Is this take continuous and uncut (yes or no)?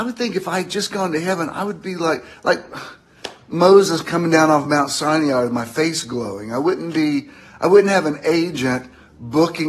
yes